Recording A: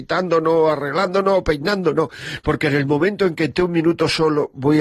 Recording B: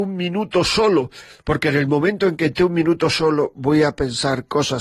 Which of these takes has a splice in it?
A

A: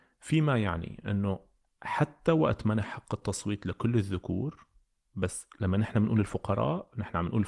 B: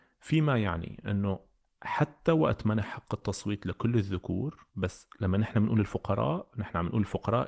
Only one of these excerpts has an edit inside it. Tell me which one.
B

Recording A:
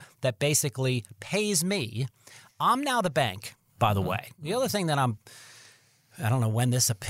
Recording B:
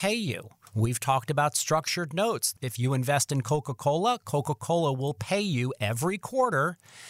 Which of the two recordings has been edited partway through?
B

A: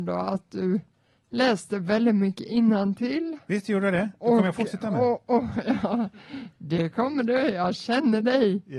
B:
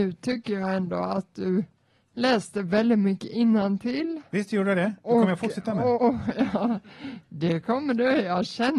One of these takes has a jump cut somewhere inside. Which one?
B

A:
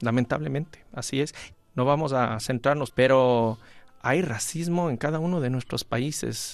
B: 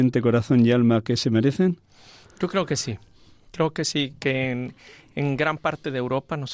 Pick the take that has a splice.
A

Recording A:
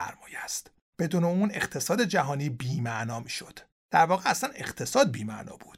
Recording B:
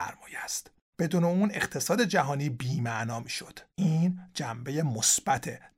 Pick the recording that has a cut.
B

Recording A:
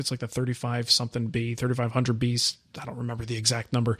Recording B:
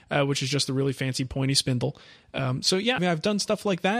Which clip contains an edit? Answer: B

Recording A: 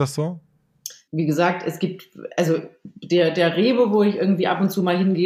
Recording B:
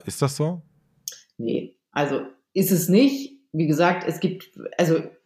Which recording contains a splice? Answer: A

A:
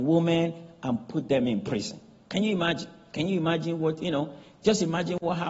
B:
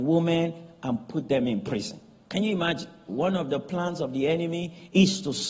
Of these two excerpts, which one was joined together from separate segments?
B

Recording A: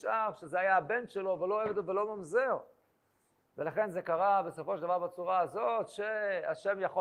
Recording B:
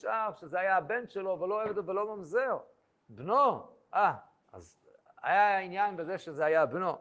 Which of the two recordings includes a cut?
B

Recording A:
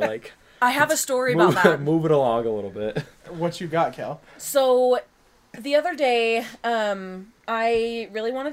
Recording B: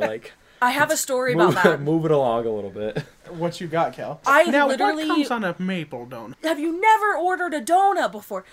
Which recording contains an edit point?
B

